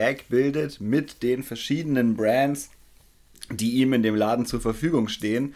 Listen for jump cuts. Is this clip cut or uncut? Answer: uncut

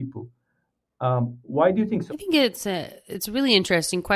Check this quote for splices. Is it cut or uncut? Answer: cut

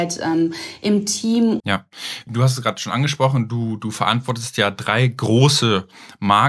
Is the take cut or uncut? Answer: cut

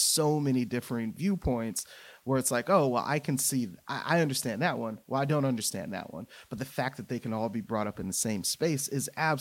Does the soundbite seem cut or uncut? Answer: uncut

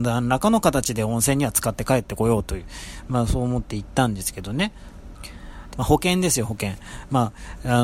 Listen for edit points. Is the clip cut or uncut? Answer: cut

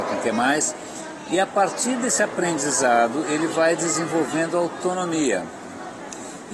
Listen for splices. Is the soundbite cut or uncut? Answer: uncut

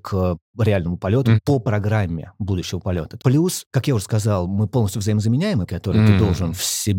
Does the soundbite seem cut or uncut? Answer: cut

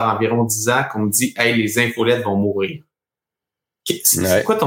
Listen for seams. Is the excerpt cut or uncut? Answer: uncut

